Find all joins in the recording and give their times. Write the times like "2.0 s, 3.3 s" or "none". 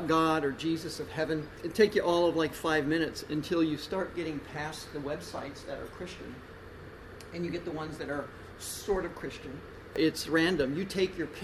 9.9 s

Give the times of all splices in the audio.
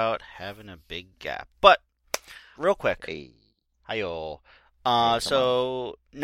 2.5 s

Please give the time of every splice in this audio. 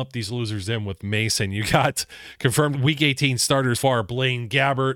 2.7 s, 3.7 s

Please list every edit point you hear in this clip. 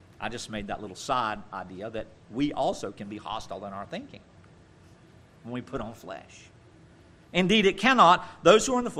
7.3 s

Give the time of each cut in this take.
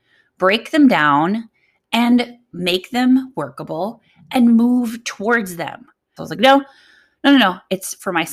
6.2 s

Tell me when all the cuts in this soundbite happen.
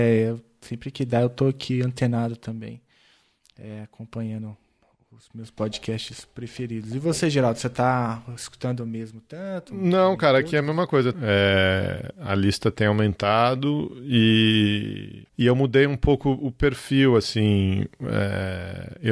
11.1 s, 15.3 s

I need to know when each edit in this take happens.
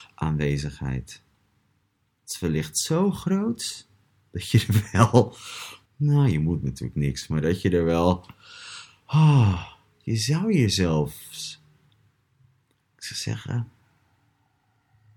5.8 s

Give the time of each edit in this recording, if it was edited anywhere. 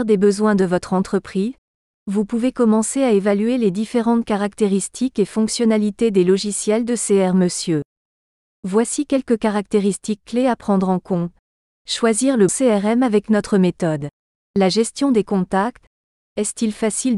12.5 s

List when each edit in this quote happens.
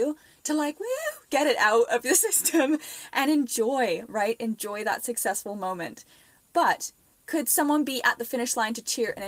none

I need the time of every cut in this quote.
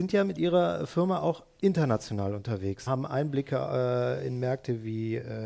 2.9 s

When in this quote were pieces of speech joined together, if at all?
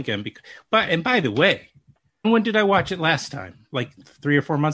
2.2 s

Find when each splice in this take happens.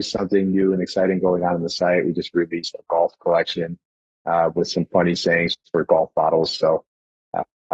none

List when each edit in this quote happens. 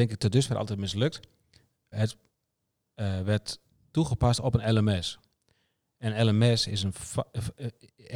1.9 s

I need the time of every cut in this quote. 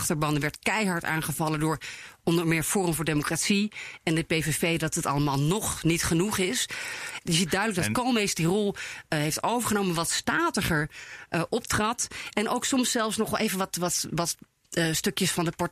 7.2 s

